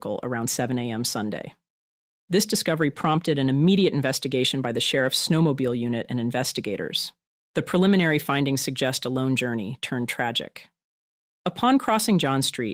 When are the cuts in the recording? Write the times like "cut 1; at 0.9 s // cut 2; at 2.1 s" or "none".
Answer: cut 1; at 11.3 s